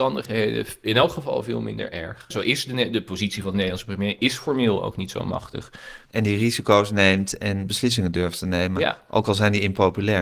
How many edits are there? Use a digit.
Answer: 2